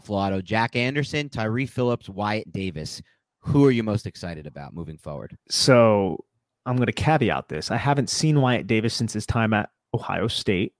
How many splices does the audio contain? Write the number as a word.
one